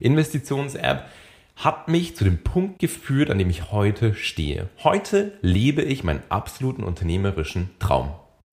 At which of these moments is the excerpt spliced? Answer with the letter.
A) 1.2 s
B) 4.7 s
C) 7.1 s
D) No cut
D